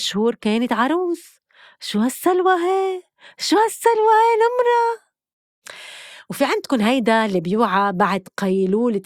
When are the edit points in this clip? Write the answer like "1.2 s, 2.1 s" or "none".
none